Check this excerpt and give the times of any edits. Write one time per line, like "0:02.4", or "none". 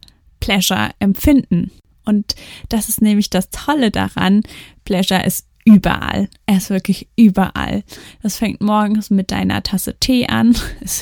none